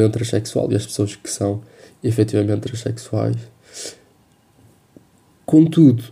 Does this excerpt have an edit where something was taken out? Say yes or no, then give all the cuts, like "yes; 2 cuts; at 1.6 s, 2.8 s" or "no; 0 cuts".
no; 0 cuts